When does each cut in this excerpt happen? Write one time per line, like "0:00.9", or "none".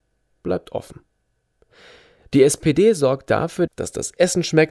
0:03.7